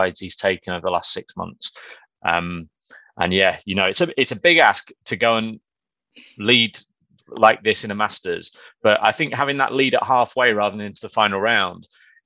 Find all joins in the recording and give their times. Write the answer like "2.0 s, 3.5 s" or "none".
2.1 s